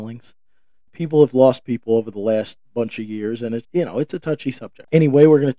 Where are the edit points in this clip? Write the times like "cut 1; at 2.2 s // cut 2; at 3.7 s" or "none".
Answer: cut 1; at 3.6 s